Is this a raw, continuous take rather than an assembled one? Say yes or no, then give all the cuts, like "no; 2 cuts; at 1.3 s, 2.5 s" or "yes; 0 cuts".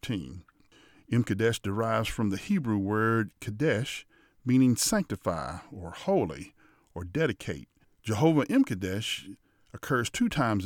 no; 1 cut; at 7.8 s